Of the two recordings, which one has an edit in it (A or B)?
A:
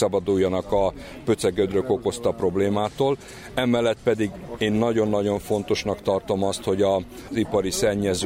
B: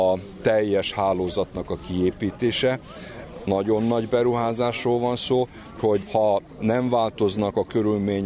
B